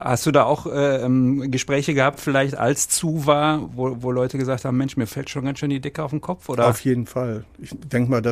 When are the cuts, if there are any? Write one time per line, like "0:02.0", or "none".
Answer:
none